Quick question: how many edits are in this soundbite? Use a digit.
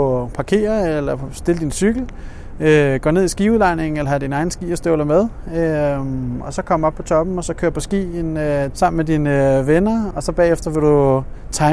2